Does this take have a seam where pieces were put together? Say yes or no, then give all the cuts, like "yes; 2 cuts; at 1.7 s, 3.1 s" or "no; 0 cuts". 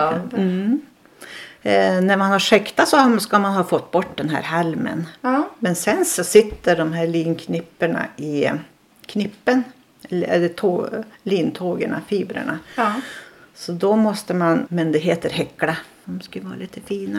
yes; 2 cuts; at 14.7 s, 16.0 s